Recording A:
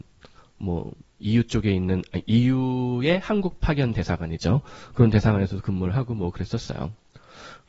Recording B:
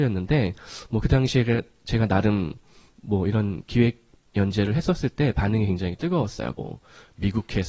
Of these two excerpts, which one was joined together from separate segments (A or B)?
B